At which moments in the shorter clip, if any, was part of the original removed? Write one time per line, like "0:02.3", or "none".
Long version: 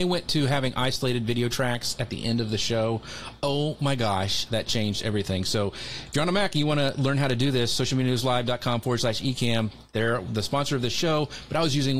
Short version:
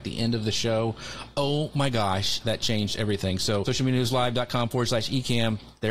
0:03.6